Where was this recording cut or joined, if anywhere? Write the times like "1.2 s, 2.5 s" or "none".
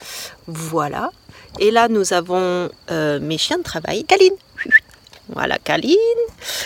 4.1 s